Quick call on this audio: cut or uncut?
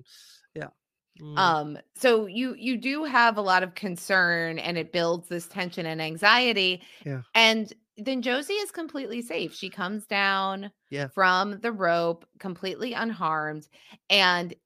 uncut